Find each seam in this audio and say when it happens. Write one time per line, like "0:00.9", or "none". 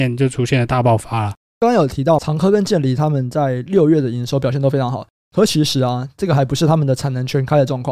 none